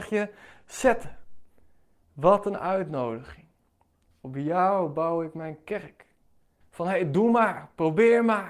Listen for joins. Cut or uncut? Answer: cut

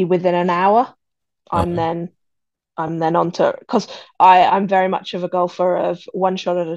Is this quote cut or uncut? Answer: uncut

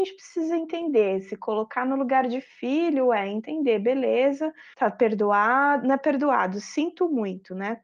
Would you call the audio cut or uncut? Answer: cut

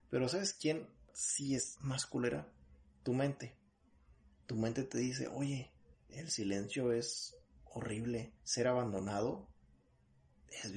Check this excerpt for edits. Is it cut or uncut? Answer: cut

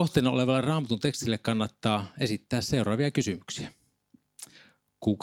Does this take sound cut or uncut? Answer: uncut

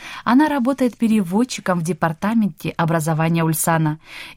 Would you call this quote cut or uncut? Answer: uncut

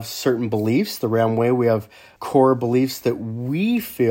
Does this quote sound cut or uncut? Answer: cut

